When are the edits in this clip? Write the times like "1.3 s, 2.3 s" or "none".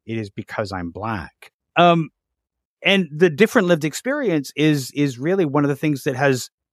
1.7 s